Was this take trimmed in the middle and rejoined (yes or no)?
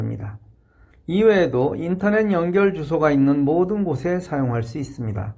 yes